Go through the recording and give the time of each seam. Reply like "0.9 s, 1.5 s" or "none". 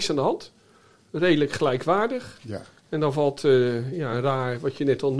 none